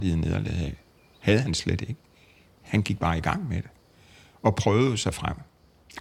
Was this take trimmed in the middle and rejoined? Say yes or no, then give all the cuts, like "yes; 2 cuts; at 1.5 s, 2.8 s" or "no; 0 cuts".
no; 0 cuts